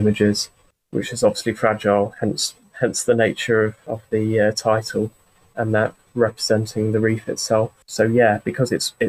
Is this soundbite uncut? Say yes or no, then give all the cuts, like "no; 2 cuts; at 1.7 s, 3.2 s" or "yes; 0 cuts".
no; 1 cut; at 7.8 s